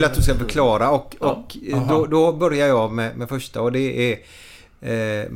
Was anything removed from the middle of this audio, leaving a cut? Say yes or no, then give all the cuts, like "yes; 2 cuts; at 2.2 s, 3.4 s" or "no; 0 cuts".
no; 0 cuts